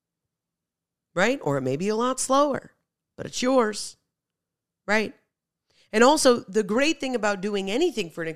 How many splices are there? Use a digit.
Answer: 0